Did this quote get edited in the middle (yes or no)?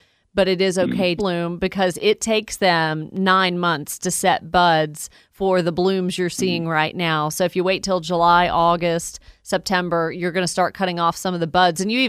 yes